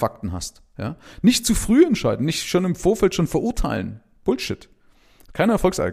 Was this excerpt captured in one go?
yes; 0 cuts

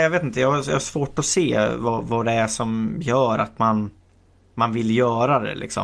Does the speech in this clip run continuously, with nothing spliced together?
yes; 0 cuts

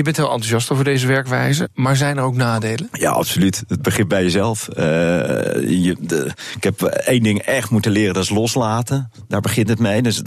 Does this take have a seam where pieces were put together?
no; 0 cuts

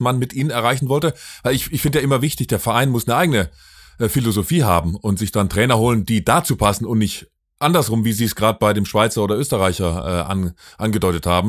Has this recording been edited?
no; 0 cuts

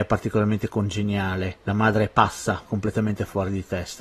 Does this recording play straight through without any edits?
no; 1 cut; at 2.7 s

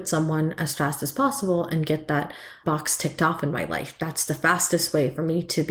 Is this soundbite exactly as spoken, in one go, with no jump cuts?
no; 1 cut; at 2.6 s

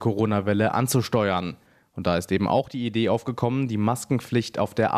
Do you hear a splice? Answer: no; 0 cuts

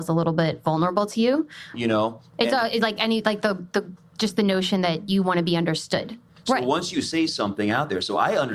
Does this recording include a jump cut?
yes; 2 cuts; at 1.7 s, 6.3 s

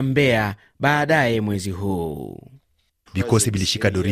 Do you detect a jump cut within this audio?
yes; 1 cut; at 3.1 s

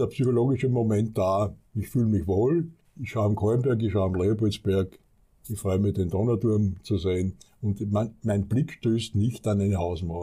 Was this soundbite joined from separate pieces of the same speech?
no; 0 cuts

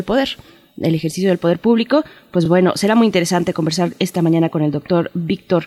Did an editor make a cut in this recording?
no; 0 cuts

